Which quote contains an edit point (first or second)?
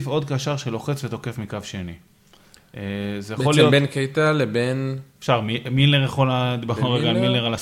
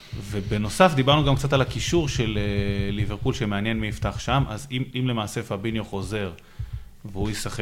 second